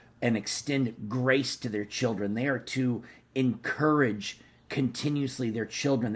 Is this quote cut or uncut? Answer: uncut